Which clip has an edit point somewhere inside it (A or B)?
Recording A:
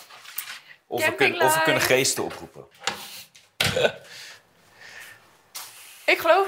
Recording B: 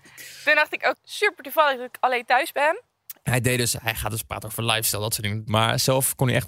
B